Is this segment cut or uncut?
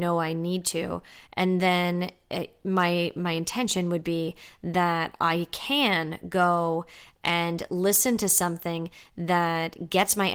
uncut